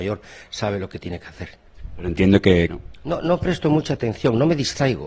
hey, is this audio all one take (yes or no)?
no